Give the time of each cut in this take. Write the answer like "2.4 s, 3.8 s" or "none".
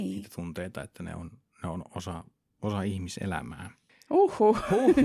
3.9 s